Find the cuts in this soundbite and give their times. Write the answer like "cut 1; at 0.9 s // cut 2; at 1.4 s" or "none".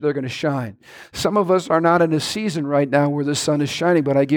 none